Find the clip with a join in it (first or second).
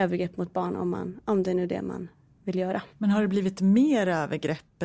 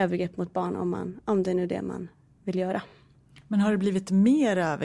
first